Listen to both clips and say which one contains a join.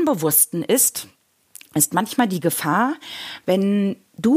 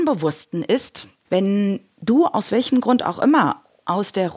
second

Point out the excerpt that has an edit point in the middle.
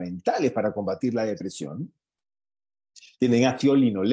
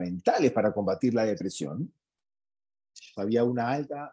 second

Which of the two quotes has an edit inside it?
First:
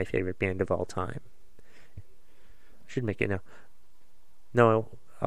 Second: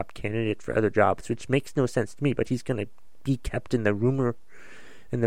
first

